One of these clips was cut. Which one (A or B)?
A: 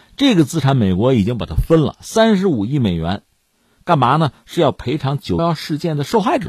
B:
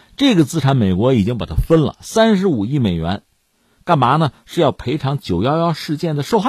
A